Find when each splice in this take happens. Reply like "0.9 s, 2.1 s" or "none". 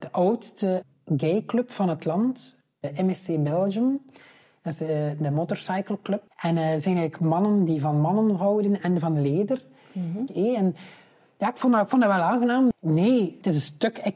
6.3 s, 10.3 s, 12.7 s